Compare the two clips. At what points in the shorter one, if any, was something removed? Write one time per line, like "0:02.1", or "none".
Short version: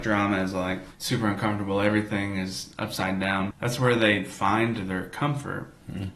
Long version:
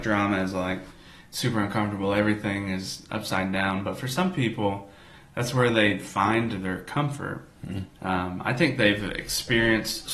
0:00.9
0:03.5